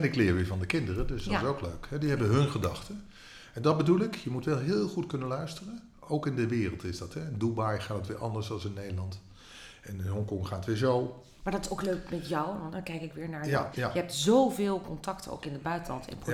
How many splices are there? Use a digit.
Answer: 1